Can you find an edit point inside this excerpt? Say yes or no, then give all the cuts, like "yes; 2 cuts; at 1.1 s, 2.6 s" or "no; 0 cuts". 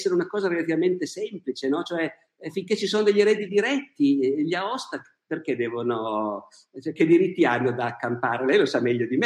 no; 0 cuts